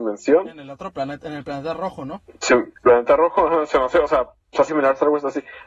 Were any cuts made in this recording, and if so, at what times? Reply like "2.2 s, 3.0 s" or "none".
2.8 s, 4.7 s